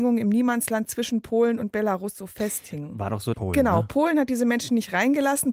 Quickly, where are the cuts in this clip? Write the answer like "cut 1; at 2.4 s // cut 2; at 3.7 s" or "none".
cut 1; at 3.3 s